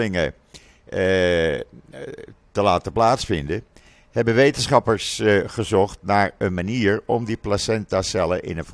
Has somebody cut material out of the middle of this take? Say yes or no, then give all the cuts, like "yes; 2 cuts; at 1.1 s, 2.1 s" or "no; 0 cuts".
no; 0 cuts